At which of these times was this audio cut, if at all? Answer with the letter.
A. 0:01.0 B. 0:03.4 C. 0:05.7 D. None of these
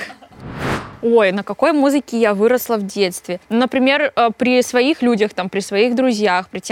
B